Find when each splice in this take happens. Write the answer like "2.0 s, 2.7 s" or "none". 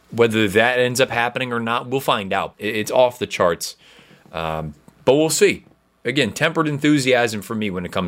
2.5 s

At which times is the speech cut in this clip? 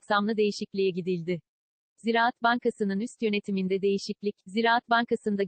2.0 s

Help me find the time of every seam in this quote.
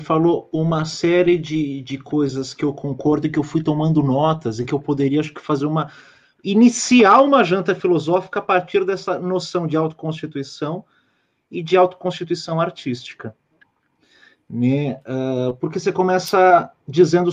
none

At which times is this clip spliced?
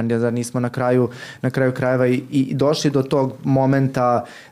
none

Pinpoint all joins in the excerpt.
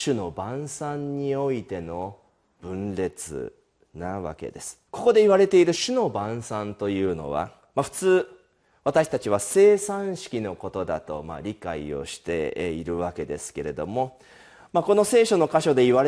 4.9 s

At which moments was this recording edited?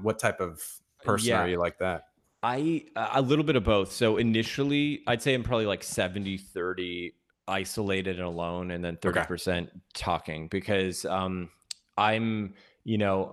none

